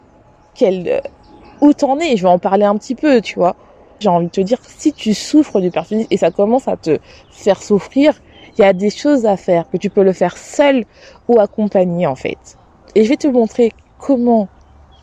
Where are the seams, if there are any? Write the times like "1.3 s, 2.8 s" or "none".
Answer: 4.0 s